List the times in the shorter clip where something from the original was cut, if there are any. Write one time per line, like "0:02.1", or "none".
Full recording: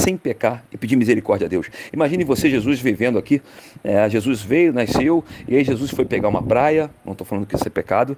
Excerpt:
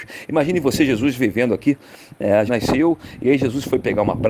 0:02.5